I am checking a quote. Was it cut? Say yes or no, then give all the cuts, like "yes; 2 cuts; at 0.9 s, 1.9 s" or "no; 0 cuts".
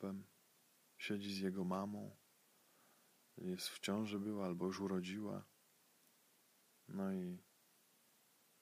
no; 0 cuts